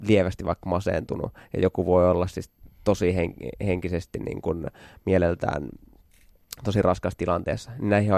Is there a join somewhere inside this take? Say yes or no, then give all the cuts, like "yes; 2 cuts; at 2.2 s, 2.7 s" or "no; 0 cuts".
no; 0 cuts